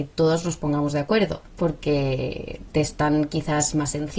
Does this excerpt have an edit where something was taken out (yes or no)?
yes